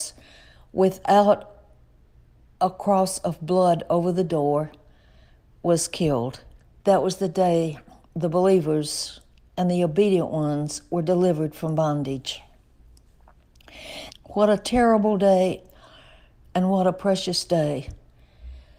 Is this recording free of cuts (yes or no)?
no